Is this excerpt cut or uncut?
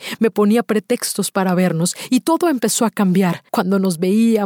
cut